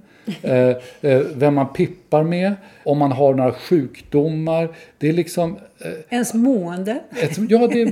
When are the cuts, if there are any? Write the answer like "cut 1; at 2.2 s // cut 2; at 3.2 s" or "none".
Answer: cut 1; at 2.8 s